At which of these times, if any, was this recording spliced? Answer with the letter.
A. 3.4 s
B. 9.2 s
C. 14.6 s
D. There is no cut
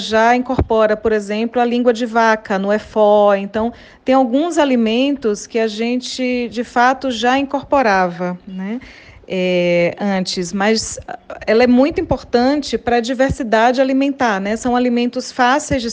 D